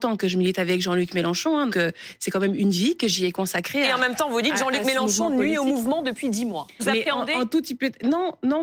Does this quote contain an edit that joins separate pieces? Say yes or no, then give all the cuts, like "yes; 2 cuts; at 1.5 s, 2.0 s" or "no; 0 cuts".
yes; 2 cuts; at 1.7 s, 6.8 s